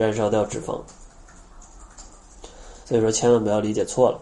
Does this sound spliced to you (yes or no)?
yes